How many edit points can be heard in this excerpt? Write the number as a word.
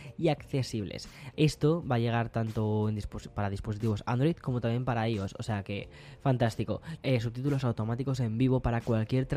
two